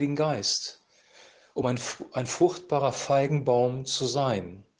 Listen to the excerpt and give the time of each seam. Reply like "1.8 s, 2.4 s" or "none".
none